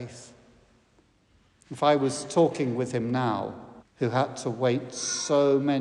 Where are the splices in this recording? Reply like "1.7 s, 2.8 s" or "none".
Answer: 3.8 s